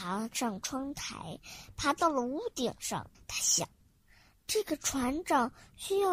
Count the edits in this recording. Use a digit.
1